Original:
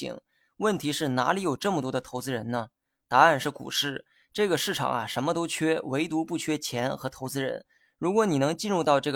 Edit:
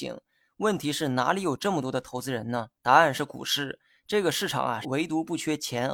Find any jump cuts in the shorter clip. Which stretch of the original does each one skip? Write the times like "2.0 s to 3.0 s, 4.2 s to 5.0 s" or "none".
2.8 s to 3.0 s, 5.1 s to 5.8 s

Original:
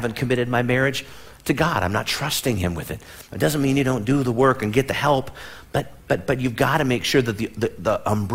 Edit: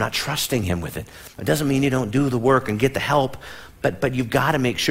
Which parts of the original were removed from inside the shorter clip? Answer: 5.7 s to 6.0 s

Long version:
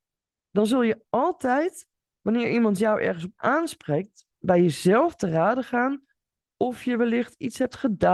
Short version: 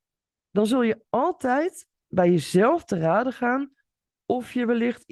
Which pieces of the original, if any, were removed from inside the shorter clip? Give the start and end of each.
2.0 s to 4.3 s

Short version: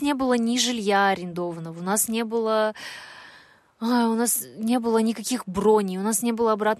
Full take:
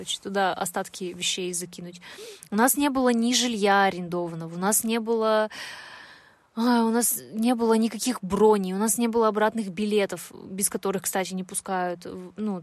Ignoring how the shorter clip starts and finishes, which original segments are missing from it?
none

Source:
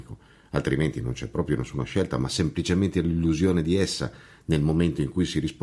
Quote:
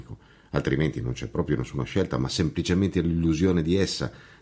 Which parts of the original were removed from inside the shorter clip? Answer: none

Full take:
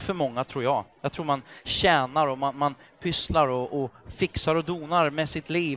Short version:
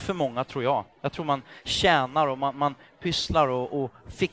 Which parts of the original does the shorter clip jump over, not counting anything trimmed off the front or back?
none

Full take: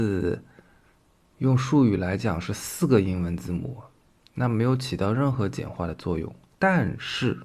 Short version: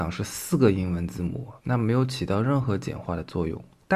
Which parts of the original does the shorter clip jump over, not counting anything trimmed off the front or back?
3.9 s to 4.3 s

